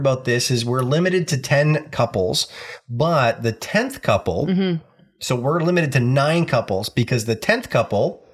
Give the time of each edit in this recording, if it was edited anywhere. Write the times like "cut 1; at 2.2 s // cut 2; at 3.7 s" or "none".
none